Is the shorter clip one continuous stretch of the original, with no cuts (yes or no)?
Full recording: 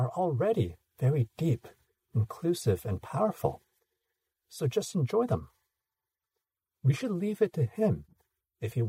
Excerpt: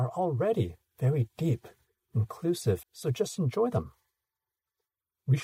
no